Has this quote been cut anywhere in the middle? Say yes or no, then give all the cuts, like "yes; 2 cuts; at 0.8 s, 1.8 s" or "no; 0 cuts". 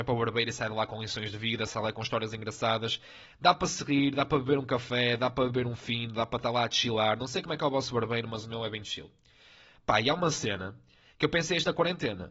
no; 0 cuts